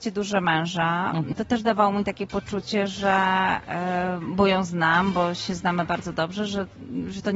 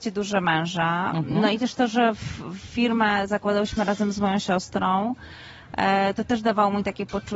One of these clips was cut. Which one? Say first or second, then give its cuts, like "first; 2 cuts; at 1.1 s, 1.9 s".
first; 1 cut; at 1.3 s